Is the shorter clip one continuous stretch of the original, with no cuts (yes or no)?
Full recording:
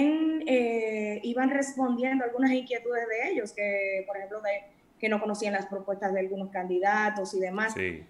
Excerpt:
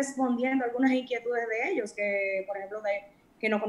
yes